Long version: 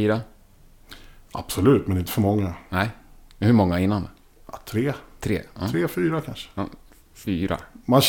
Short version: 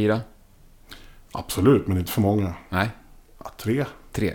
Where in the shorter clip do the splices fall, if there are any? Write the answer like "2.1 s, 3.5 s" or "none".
3.2 s